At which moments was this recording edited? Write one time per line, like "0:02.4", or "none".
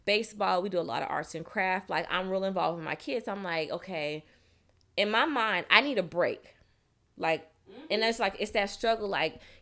none